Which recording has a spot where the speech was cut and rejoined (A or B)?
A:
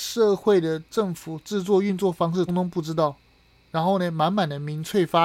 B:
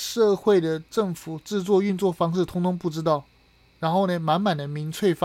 A